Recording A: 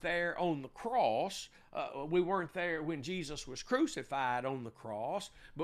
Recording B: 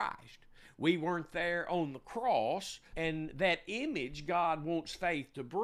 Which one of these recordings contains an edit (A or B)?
B